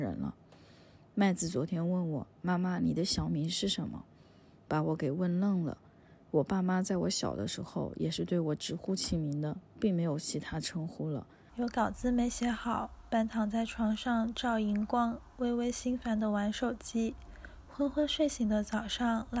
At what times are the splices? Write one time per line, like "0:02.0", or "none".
0:11.5